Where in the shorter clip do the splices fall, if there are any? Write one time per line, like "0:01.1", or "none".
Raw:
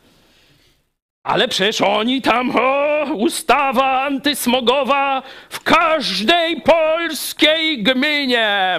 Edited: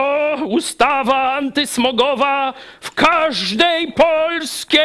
none